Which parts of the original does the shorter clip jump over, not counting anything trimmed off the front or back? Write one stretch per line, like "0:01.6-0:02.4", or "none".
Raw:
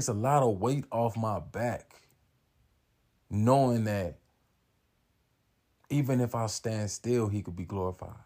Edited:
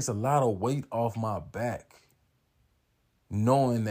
none